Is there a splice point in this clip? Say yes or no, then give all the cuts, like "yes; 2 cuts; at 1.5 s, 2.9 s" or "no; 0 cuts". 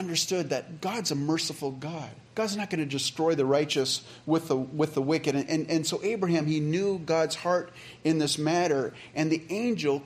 yes; 1 cut; at 2.3 s